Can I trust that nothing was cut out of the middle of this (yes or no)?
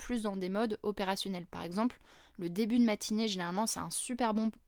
yes